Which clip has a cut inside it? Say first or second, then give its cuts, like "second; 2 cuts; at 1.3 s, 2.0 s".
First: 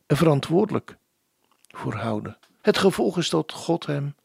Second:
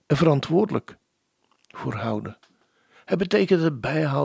first; 1 cut; at 2.6 s